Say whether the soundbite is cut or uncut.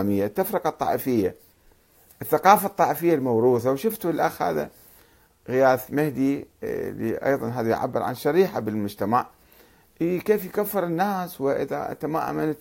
uncut